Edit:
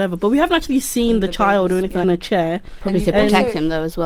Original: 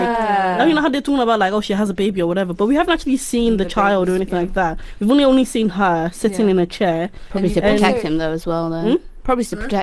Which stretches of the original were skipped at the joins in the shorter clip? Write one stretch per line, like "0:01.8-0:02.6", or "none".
0:04.4-0:06.5